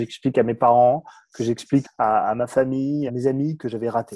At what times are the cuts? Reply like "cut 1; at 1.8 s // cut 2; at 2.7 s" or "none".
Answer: cut 1; at 1.8 s // cut 2; at 3.1 s